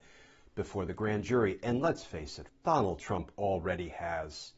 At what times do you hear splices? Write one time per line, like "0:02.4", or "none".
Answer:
0:02.5

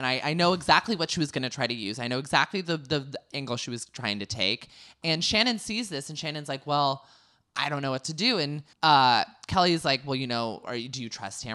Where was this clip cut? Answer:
0:08.7

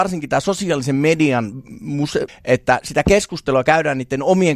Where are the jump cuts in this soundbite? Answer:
0:02.3

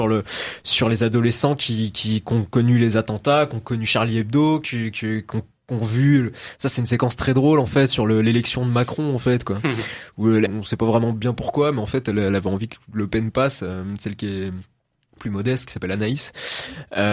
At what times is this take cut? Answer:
0:10.5

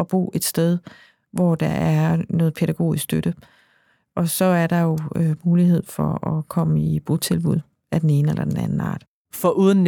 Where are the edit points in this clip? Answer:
none

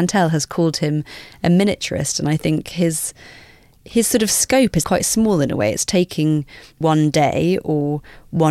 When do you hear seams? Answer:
0:04.8

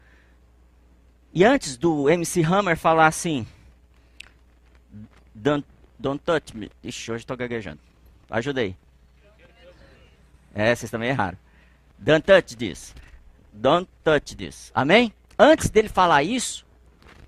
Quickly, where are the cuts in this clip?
none

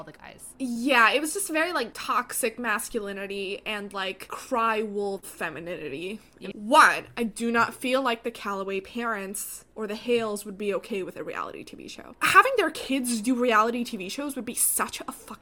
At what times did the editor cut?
0:06.5
0:12.1

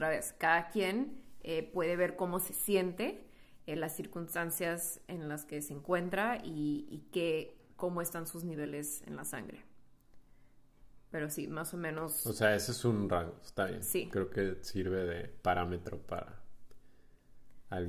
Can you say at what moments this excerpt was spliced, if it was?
none

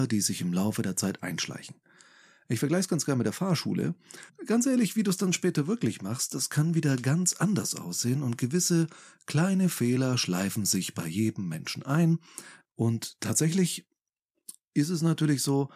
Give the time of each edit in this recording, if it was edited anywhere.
0:04.3
0:12.6

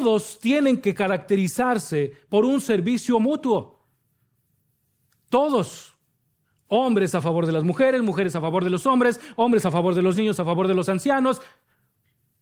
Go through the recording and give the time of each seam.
0:10.1

